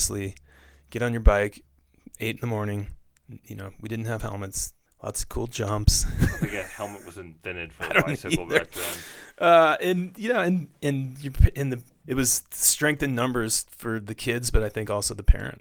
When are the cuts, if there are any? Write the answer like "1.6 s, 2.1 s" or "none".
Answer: none